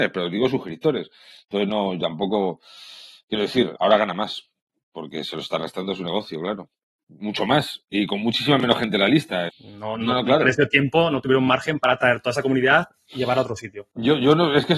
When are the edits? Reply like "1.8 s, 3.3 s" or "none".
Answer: 3.7 s, 9.5 s